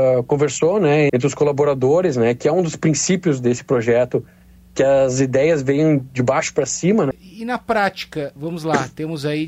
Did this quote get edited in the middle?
yes; 3 cuts; at 1.1 s, 7.1 s, 8.4 s

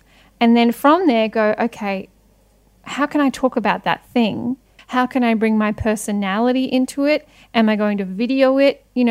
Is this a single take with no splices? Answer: no; 1 cut; at 4.8 s

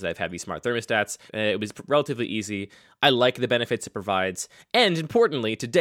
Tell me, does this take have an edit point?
yes; 1 cut; at 1.3 s

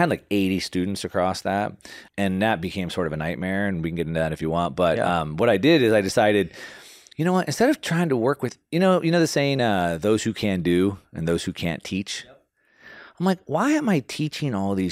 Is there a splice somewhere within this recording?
no; 0 cuts

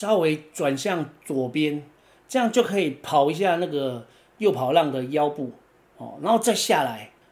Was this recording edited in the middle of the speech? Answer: no; 0 cuts

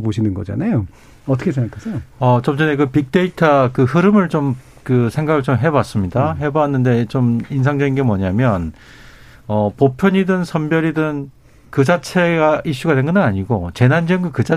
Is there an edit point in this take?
no; 0 cuts

